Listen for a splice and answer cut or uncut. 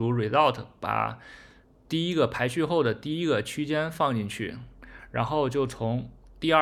uncut